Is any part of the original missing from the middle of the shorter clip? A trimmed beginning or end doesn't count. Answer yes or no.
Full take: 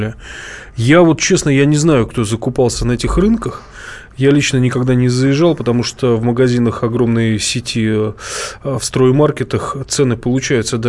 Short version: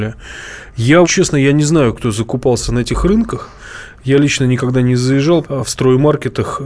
yes